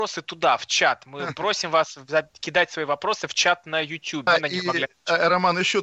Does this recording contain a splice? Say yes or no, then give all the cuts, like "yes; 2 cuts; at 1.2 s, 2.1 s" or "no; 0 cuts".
yes; 1 cut; at 4.3 s